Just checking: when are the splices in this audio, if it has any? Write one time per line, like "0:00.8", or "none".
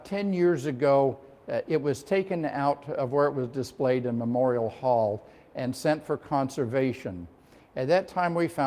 none